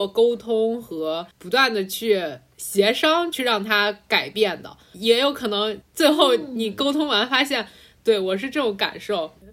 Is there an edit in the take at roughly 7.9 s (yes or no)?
yes